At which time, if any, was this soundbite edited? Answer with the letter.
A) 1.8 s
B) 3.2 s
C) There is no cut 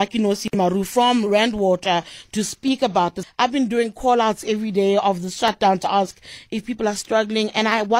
B